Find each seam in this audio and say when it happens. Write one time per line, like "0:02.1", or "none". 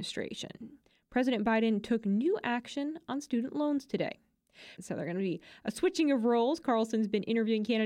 0:04.8